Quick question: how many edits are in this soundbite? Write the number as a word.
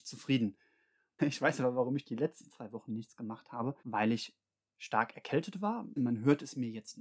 three